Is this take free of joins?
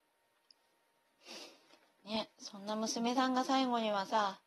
yes; 0 cuts

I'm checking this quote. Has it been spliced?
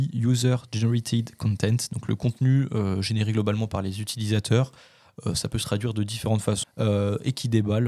yes; 1 cut; at 6.6 s

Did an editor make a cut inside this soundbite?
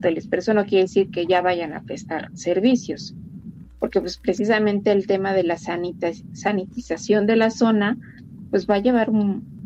no; 0 cuts

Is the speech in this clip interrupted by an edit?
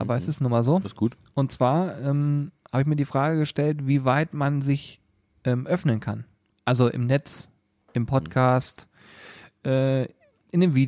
no; 0 cuts

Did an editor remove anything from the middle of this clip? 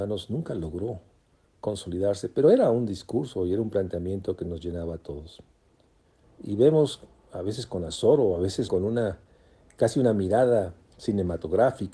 yes; 2 cuts; at 6.2 s, 8.7 s

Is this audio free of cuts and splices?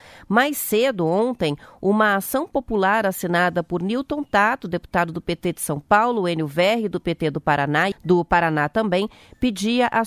no; 1 cut; at 7.9 s

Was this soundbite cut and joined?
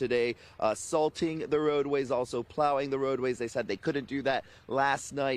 no; 0 cuts

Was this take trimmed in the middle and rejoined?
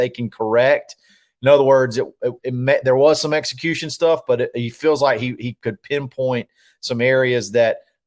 no; 0 cuts

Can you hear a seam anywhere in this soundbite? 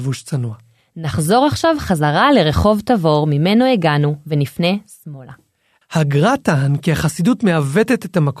yes; 1 cut; at 5.8 s

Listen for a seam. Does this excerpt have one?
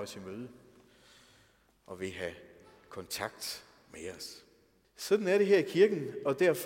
yes; 1 cut; at 4.8 s

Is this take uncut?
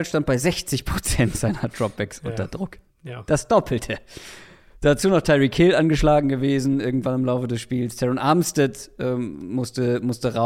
yes; 0 cuts

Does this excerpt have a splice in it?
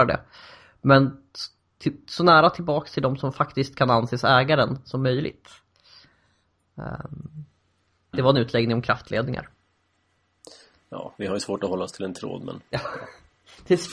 yes; 1 cut; at 8.1 s

